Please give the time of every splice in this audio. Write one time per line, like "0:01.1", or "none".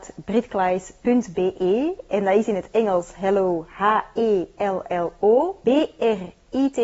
0:05.6